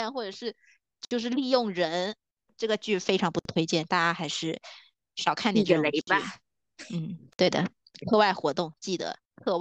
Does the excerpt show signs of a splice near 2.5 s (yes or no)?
yes